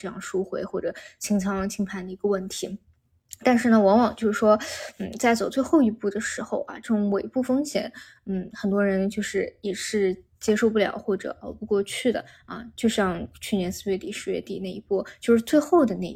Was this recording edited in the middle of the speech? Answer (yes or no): no